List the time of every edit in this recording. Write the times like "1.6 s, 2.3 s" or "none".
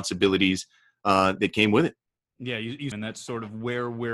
2.9 s